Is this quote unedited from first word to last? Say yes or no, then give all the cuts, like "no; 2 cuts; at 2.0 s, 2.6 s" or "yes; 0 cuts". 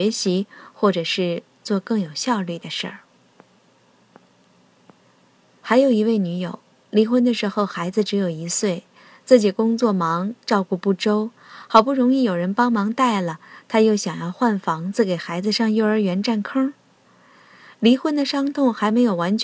yes; 0 cuts